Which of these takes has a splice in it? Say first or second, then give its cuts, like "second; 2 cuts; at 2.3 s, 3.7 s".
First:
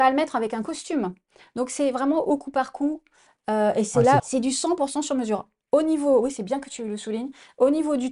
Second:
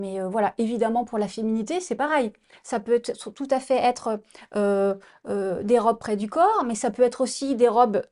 first; 1 cut; at 4.2 s